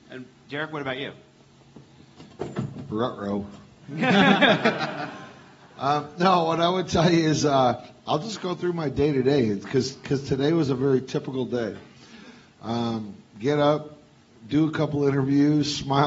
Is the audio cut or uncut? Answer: uncut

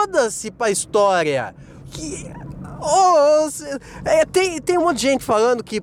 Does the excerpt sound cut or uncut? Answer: cut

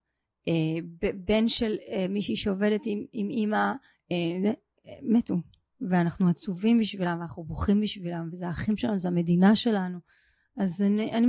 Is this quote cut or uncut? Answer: uncut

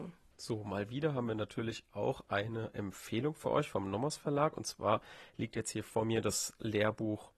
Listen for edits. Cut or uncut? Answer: uncut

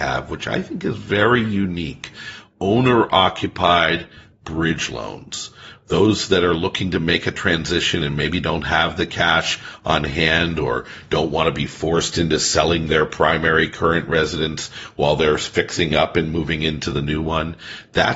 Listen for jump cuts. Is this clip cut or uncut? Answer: uncut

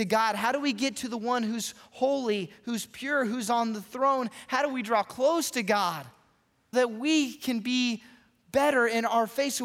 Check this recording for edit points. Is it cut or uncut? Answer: cut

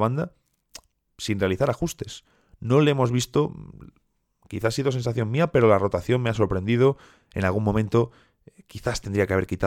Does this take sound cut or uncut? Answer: uncut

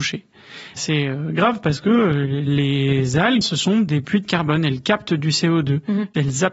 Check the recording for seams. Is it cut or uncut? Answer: cut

